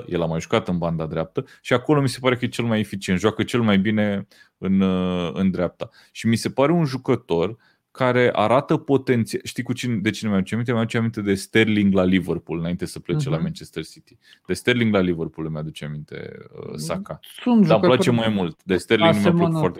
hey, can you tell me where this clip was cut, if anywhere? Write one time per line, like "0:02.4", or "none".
none